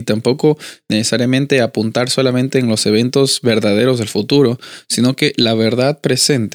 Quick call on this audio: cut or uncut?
uncut